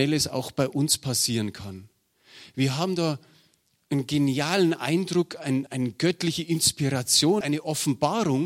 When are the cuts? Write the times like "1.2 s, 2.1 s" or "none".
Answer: 5.7 s, 7.4 s